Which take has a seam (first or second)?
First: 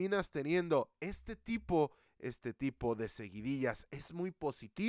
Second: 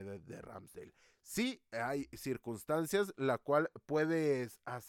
first